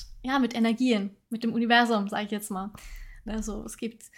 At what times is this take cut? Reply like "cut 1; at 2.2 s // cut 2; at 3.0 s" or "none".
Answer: cut 1; at 3.3 s